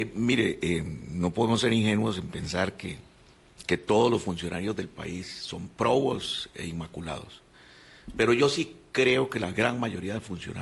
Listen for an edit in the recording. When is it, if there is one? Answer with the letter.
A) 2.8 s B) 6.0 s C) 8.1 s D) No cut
D